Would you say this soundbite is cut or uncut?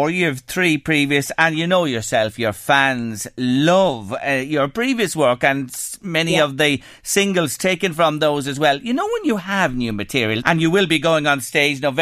cut